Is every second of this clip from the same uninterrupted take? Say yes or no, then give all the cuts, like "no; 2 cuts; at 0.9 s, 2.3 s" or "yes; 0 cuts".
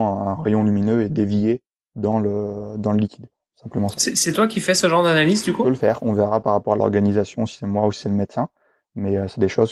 yes; 0 cuts